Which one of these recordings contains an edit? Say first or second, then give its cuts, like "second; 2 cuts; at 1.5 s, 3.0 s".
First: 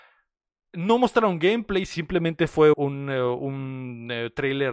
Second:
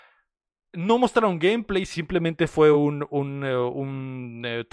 first; 1 cut; at 2.7 s